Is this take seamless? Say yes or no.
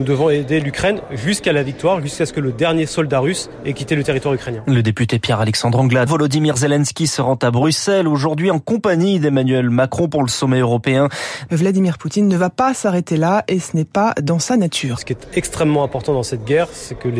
no